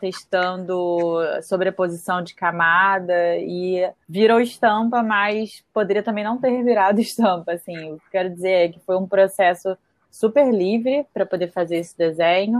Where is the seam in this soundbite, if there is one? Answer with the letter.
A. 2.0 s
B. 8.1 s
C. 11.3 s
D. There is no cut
B